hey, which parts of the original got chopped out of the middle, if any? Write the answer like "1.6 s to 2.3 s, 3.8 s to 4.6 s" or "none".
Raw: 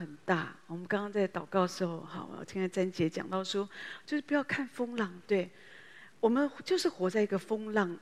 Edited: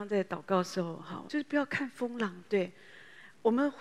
2.3 s to 4.0 s